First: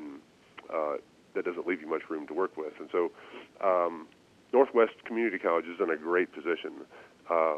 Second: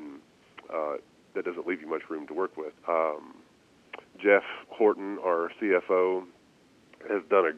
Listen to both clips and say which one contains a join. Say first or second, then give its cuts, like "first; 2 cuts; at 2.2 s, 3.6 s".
second; 1 cut; at 2.7 s